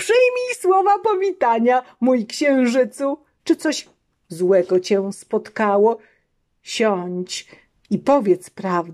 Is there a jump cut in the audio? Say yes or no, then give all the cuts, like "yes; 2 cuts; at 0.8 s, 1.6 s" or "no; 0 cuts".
yes; 1 cut; at 3.4 s